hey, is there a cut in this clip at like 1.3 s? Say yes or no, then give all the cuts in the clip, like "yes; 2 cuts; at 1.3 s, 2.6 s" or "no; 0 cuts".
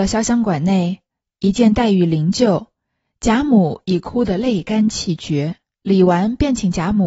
no; 1 cut; at 5.8 s